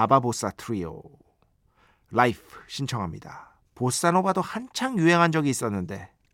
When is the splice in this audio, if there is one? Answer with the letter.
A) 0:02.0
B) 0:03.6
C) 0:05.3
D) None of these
B